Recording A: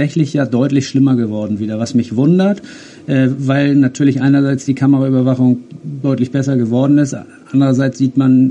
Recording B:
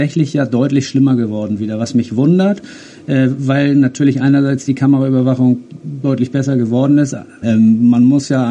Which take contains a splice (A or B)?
B